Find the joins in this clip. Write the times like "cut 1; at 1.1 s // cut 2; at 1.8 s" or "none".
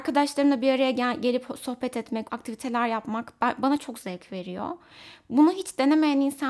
cut 1; at 2.3 s